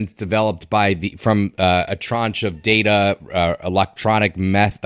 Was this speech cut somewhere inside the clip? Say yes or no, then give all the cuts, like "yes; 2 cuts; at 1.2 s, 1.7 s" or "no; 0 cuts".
no; 0 cuts